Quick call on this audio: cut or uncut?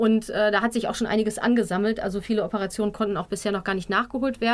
uncut